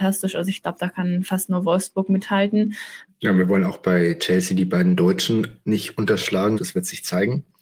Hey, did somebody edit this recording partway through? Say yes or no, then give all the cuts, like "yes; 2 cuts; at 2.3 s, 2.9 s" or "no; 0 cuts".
yes; 2 cuts; at 3.1 s, 6.6 s